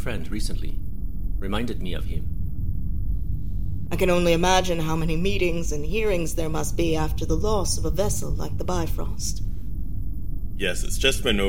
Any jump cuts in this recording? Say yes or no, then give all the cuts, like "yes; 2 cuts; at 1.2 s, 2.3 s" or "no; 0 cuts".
yes; 1 cut; at 3.9 s